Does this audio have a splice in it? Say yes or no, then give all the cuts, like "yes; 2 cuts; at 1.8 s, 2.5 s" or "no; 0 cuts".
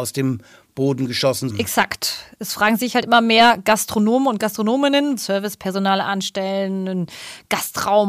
yes; 2 cuts; at 1.5 s, 5.2 s